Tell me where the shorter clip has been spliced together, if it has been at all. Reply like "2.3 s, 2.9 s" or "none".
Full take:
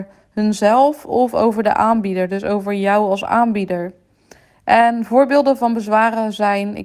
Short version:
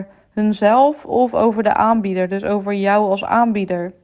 none